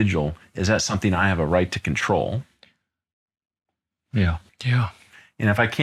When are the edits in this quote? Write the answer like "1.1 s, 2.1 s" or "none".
4.5 s